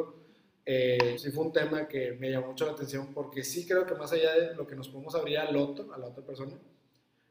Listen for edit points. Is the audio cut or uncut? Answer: cut